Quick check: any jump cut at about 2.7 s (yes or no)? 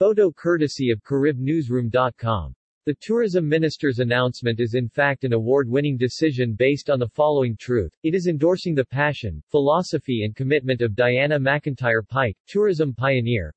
no